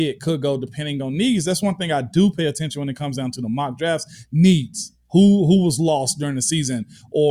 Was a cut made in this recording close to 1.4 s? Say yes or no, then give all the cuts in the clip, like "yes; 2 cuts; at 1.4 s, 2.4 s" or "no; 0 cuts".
no; 0 cuts